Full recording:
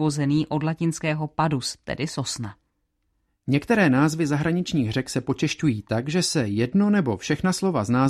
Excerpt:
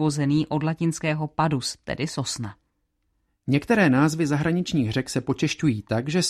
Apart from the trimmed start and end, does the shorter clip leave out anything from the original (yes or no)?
no